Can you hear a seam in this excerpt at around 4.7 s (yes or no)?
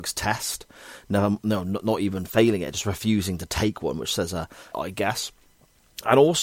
yes